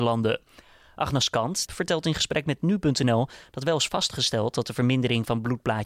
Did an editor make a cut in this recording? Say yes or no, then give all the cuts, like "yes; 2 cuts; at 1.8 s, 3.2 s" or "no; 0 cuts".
yes; 1 cut; at 1.7 s